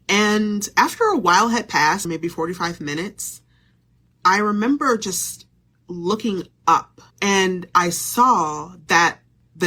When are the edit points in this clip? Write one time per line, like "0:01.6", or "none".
0:02.0
0:07.1